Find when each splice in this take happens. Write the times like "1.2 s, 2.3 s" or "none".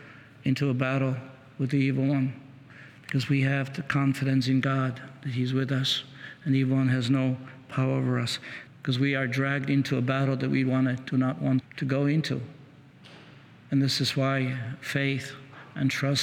8.7 s, 11.6 s